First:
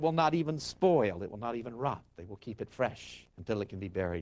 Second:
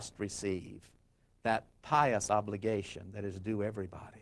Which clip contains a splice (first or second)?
first